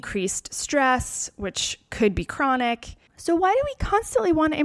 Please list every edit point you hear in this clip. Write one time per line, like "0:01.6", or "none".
0:03.1